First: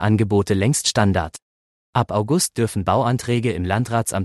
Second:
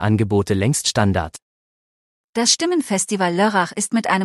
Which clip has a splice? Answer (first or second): first